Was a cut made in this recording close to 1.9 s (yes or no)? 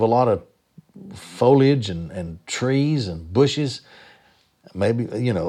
no